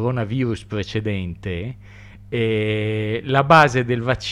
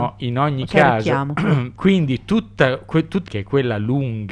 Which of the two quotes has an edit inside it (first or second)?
second